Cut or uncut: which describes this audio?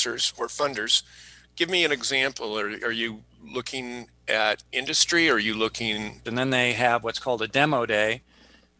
cut